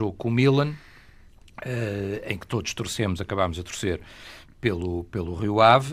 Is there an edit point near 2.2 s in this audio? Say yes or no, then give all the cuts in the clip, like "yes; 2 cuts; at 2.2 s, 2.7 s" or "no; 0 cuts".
no; 0 cuts